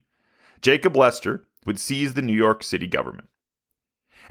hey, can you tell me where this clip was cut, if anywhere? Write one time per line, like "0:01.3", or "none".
0:01.6

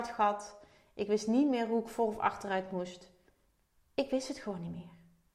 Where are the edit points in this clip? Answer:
none

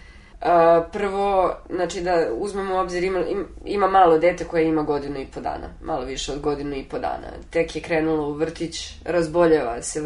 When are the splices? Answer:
none

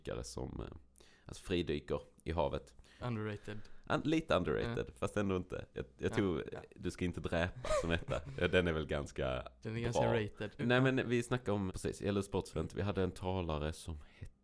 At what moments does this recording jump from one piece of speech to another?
0:03.0
0:10.6
0:11.7

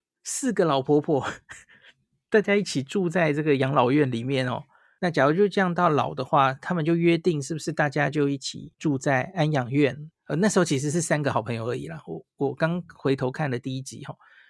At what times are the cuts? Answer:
0:05.0
0:08.7
0:10.1

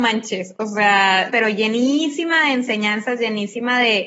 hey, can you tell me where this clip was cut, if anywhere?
0:01.3

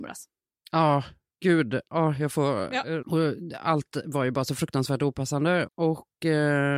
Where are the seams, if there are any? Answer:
0:03.0
0:05.7

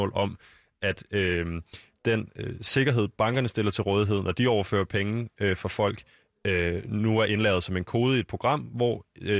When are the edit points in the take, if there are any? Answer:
none

